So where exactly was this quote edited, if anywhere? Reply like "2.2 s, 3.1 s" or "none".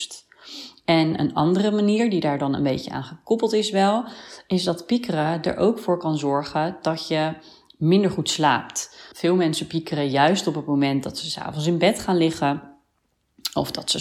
9.1 s